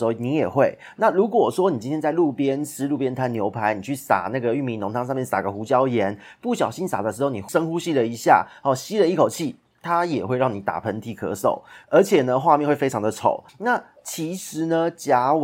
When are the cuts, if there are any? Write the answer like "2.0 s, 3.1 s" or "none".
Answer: 13.5 s